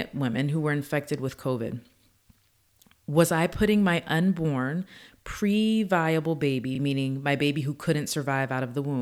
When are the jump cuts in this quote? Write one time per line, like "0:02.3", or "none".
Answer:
none